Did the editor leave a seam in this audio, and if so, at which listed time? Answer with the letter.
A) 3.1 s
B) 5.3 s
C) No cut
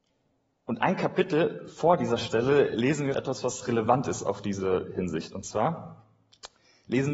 A